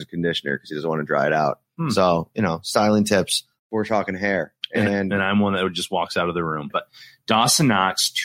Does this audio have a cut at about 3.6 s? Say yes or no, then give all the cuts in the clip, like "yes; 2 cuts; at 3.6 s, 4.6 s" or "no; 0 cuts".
yes; 2 cuts; at 3.6 s, 6.7 s